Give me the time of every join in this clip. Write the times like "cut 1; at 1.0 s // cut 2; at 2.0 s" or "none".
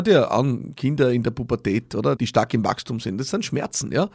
cut 1; at 2.2 s